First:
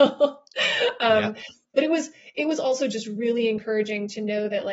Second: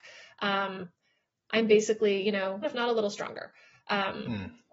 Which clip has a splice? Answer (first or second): second